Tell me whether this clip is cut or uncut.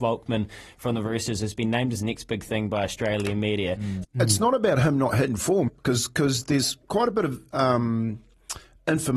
cut